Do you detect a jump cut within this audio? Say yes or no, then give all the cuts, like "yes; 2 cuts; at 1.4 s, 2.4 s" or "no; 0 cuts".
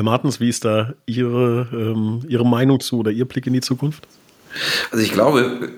no; 0 cuts